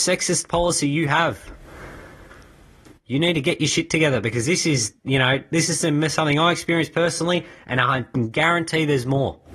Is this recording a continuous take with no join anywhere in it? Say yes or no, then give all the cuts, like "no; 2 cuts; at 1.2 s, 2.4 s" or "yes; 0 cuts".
yes; 0 cuts